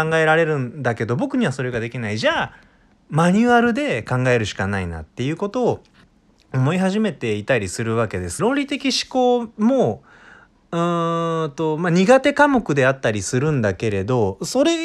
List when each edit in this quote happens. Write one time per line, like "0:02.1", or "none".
0:08.4